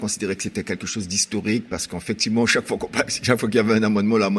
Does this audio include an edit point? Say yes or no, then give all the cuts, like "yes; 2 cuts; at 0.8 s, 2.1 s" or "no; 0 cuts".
no; 0 cuts